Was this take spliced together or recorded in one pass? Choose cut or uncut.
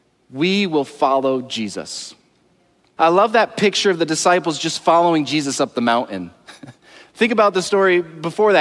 cut